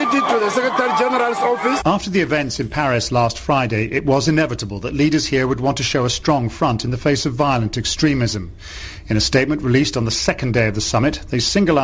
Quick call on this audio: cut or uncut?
cut